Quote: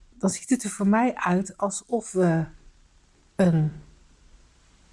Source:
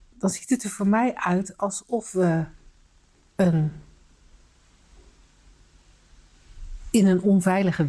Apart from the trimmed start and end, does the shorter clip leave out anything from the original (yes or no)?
no